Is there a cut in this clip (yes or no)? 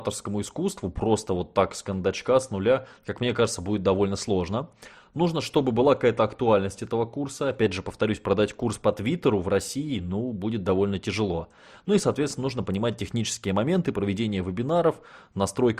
no